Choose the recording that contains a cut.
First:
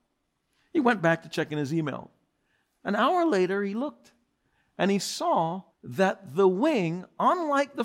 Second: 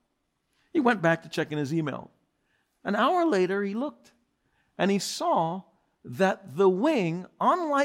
first; 1 cut; at 5.7 s

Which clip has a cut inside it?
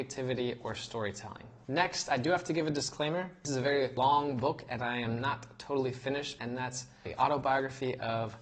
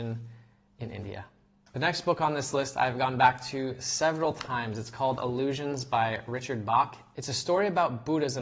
first; 1 cut; at 6.4 s

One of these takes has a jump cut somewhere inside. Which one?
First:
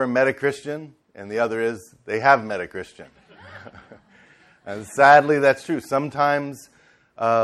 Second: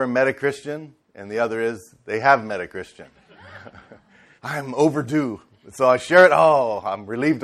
second; 1 cut; at 4.4 s

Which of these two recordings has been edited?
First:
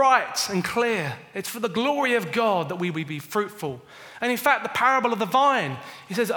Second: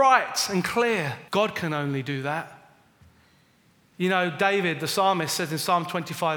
second; 1 cut; at 1.3 s

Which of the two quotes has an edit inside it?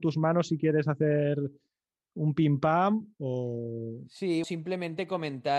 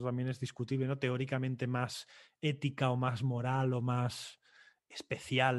first; 1 cut; at 4.4 s

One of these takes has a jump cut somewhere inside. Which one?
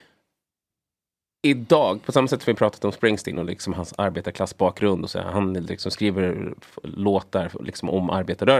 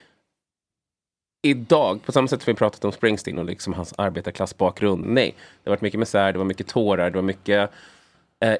second; 1 cut; at 5.0 s

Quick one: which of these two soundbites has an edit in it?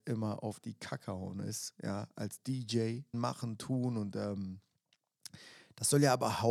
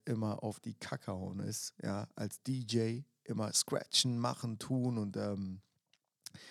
first; 1 cut; at 3.1 s

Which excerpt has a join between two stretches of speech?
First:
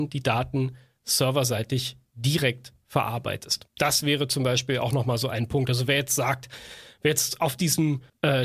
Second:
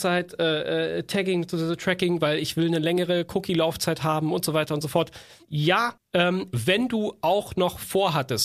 second; 2 cuts; at 5.4 s, 6.5 s

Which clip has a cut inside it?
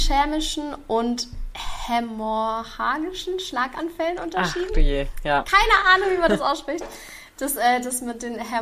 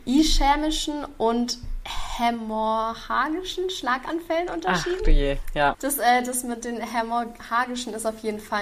second; 1 cut; at 5.7 s

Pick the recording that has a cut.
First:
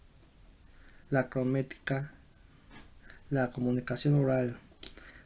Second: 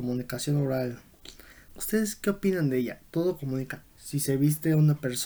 second; 2 cuts; at 1.7 s, 3.8 s

